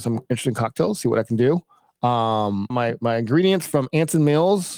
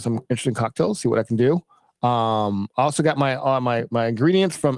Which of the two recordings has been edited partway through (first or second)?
first